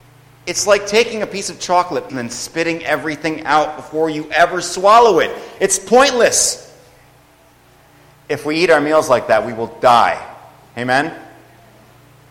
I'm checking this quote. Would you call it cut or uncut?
cut